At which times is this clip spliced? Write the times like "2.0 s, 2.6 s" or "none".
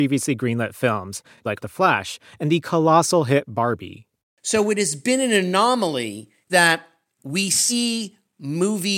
none

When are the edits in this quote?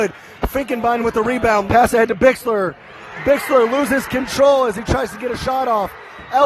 1.7 s

